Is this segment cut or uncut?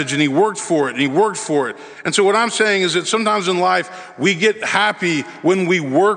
uncut